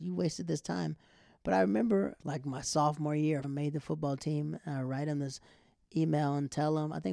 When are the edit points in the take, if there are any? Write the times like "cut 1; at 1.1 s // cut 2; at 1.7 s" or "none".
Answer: cut 1; at 2.2 s // cut 2; at 3.4 s